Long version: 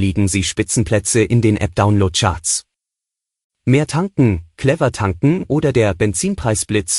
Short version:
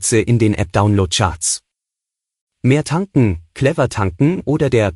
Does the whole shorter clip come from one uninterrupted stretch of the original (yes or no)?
yes